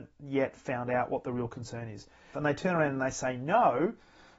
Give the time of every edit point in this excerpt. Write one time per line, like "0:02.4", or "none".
0:02.3